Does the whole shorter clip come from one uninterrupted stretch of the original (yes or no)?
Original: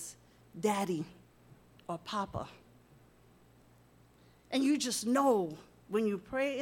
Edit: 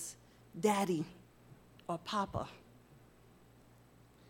yes